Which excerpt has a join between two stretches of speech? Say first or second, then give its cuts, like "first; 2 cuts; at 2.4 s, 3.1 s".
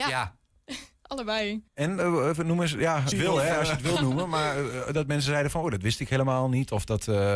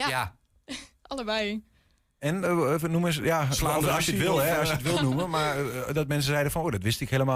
first; 2 cuts; at 1.7 s, 3.1 s